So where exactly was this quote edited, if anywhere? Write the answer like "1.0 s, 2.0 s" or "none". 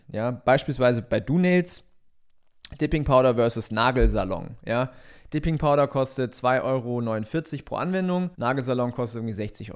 8.3 s